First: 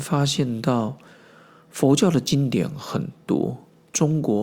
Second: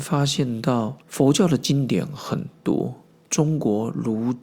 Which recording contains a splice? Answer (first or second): second